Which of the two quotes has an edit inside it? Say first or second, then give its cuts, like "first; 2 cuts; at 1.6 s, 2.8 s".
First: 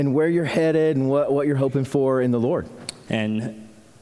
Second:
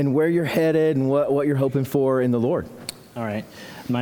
first; 1 cut; at 3.1 s